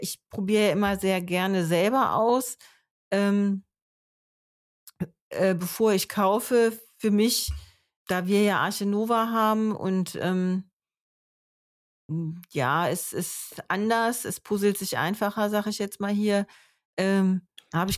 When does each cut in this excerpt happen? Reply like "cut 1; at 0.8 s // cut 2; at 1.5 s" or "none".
cut 1; at 8.0 s

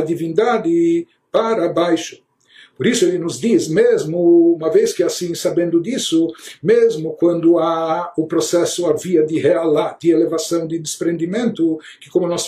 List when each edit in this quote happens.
none

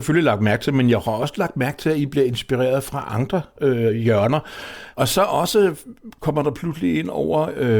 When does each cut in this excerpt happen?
cut 1; at 4.9 s

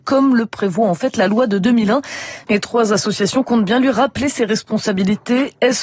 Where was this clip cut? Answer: cut 1; at 2.5 s

